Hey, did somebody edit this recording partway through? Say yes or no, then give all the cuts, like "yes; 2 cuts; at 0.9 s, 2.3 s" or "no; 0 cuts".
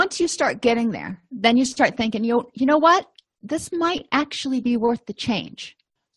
no; 0 cuts